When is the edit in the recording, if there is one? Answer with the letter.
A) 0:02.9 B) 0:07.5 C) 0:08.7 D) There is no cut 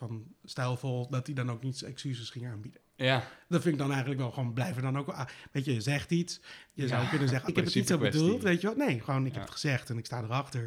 B